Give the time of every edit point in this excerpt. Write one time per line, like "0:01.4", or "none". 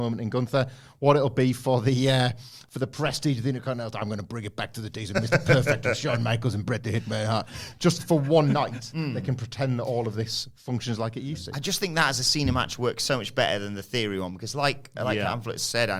none